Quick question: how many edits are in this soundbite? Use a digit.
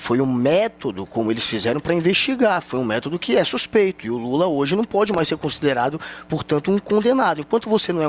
0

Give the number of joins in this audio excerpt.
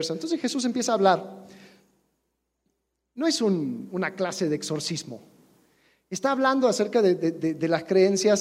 0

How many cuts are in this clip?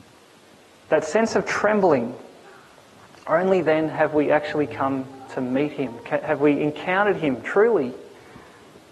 0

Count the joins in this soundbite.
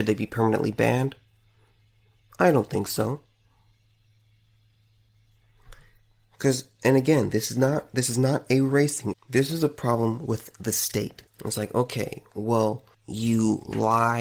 3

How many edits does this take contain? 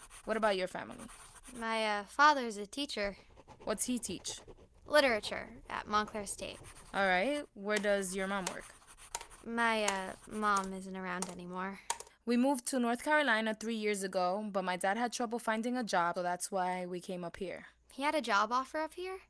2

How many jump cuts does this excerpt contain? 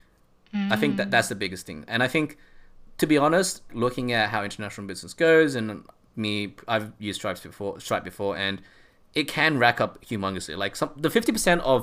1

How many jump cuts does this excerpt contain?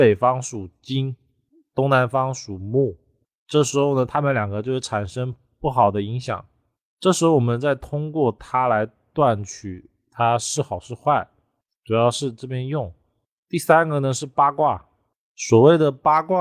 0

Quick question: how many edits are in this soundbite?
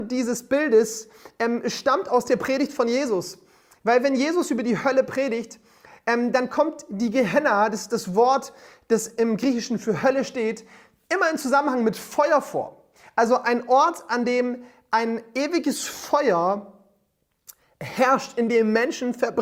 0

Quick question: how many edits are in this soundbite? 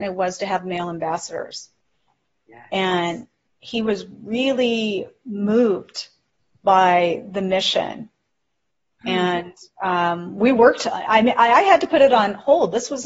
0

